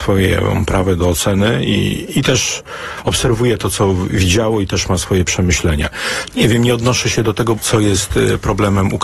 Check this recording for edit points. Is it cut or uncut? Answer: cut